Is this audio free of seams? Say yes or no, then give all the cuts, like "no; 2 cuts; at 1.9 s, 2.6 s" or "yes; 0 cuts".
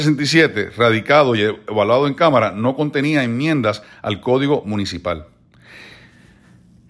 yes; 0 cuts